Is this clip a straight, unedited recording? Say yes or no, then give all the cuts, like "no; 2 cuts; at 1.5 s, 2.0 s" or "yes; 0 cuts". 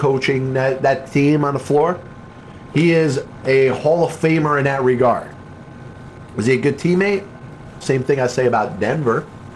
no; 2 cuts; at 2.7 s, 7.8 s